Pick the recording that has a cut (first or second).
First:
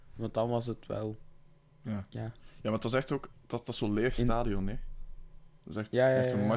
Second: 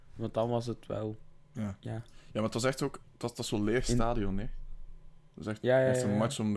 second